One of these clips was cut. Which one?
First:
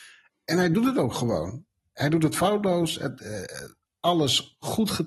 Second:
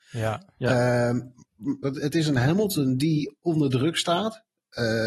second; 1 cut; at 1.8 s

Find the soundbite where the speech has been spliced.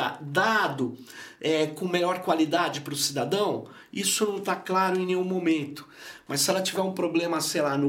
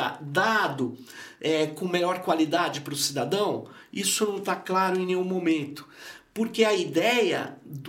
first; 1 cut; at 6.3 s

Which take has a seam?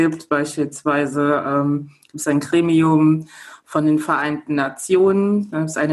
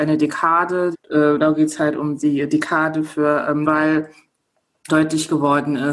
second; 3 cuts; at 0.9 s, 3.6 s, 4.9 s

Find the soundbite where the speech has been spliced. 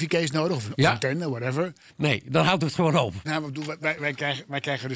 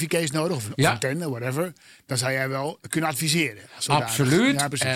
first; 2 cuts; at 1.9 s, 3.2 s

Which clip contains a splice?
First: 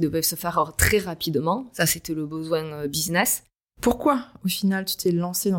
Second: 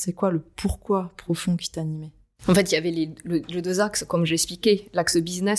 first; 1 cut; at 3.7 s

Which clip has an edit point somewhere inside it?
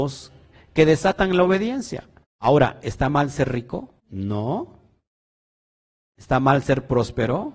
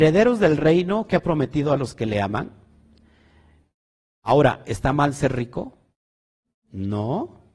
first; 2 cuts; at 2.2 s, 4.0 s

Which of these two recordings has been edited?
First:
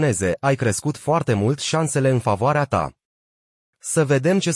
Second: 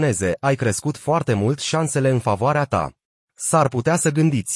second; 1 cut; at 3.2 s

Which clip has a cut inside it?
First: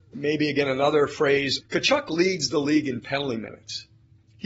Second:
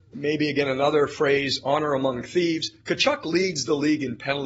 first; 1 cut; at 1.6 s

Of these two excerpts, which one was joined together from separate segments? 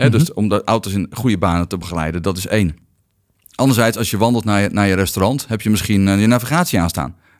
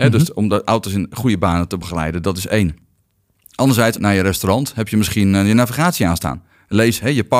second; 1 cut; at 4.0 s

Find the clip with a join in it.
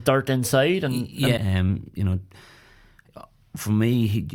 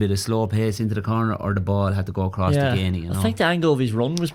first; 1 cut; at 1.4 s

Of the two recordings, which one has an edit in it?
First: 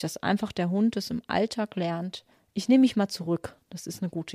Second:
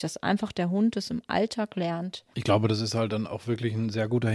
second; 1 cut; at 2.3 s

